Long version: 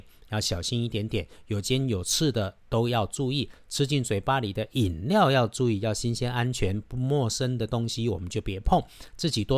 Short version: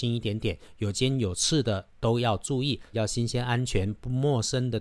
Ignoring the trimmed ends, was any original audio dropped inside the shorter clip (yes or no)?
yes